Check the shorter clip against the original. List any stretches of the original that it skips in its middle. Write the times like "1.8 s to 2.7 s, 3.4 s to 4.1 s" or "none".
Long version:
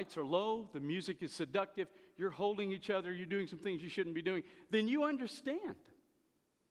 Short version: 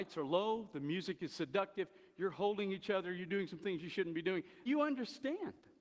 4.7 s to 4.9 s